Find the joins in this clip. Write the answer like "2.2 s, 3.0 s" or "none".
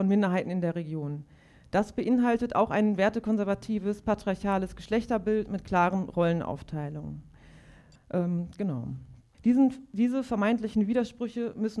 7.9 s, 9.3 s